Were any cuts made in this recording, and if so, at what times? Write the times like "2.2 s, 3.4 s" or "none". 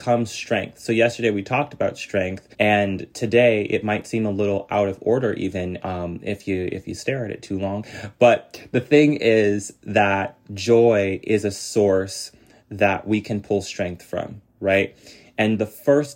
2.5 s